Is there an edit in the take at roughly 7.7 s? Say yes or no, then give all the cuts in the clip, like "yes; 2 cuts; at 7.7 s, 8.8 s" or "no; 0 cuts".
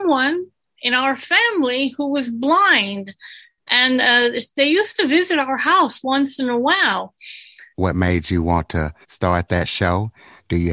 yes; 2 cuts; at 7.7 s, 9.0 s